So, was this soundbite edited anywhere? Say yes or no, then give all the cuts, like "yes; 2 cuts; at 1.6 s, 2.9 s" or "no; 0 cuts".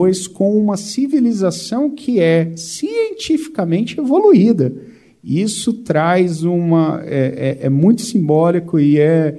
no; 0 cuts